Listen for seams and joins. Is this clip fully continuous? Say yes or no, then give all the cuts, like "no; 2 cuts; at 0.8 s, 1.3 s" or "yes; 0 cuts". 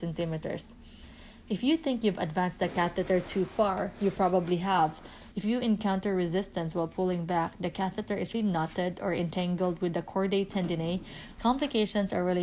no; 3 cuts; at 5.3 s, 8.3 s, 11.4 s